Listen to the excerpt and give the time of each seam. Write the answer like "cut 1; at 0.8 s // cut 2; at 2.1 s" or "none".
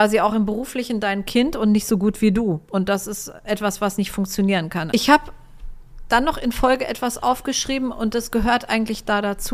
cut 1; at 4.9 s

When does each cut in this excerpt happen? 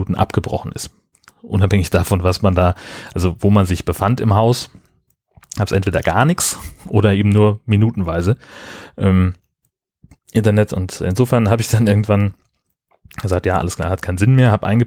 none

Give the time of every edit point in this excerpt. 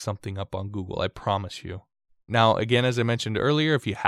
cut 1; at 2.3 s

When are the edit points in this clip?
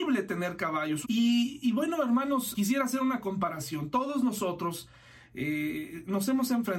cut 1; at 1.0 s // cut 2; at 2.5 s

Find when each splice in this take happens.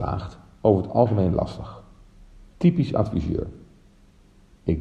cut 1; at 2.5 s

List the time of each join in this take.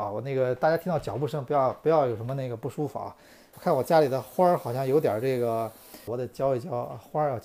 cut 1; at 3.5 s // cut 2; at 6.1 s

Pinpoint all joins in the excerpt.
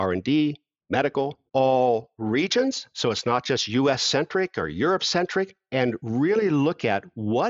cut 1; at 1.5 s

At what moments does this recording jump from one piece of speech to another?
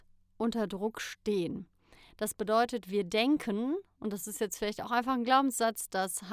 none

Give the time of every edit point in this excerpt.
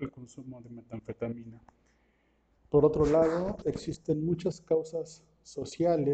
cut 1; at 2.5 s

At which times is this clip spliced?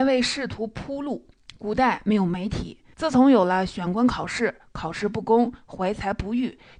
cut 1; at 2.9 s

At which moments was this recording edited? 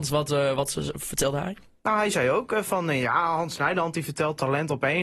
none

